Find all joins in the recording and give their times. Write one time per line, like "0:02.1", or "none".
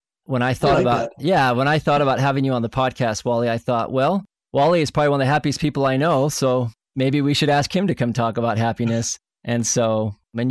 none